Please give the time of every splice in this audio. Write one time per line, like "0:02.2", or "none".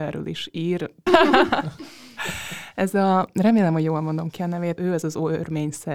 0:01.1
0:04.8